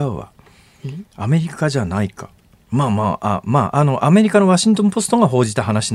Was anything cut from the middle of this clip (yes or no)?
no